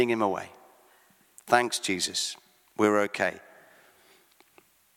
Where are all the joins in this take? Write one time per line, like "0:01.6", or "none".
none